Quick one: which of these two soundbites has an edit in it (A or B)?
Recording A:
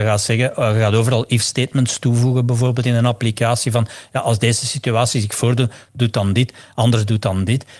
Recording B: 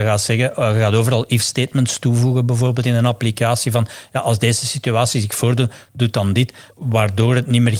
B